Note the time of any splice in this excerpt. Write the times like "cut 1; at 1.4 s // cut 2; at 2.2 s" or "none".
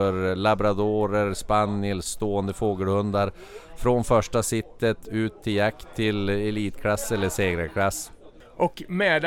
none